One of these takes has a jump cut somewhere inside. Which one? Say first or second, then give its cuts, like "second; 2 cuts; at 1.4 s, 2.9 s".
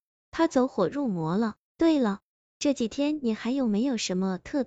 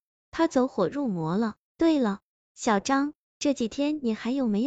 first; 1 cut; at 2.4 s